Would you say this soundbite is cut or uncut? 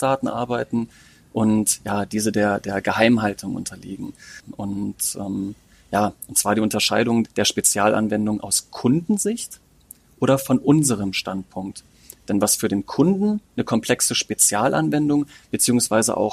cut